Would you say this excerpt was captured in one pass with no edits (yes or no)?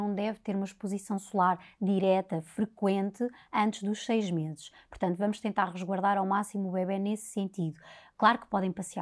yes